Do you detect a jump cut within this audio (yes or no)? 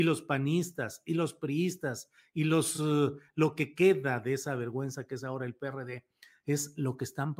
no